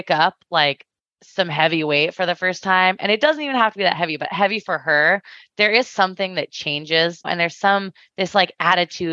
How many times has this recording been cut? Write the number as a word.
one